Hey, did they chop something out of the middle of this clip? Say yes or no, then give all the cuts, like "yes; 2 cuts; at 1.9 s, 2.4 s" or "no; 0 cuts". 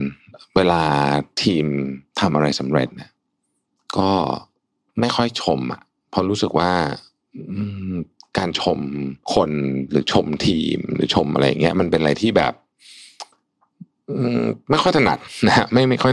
yes; 1 cut; at 9.2 s